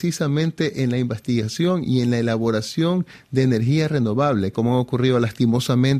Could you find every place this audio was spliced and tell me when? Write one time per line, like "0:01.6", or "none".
0:04.5

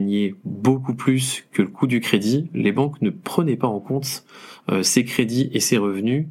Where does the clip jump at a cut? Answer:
none

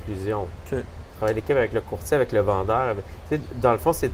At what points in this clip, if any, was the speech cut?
none

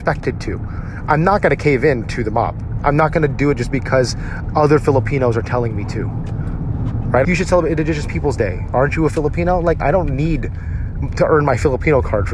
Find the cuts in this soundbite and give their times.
0:02.8
0:07.2
0:09.8

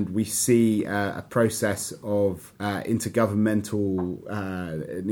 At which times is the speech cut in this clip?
0:02.6

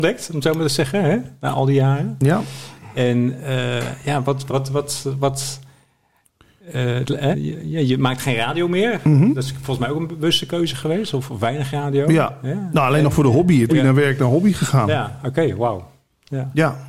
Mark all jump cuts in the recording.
0:04.5
0:07.3
0:13.7

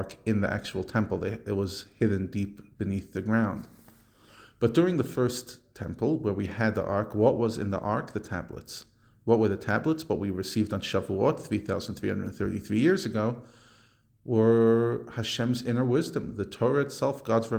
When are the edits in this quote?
none

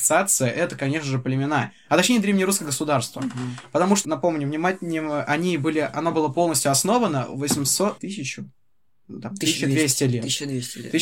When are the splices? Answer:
0:04.0
0:08.0

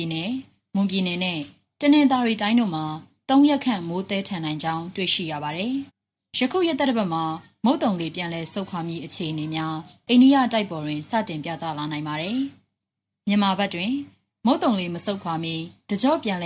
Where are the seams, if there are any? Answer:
0:05.9

